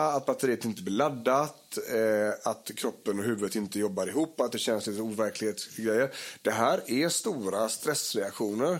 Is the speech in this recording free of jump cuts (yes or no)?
yes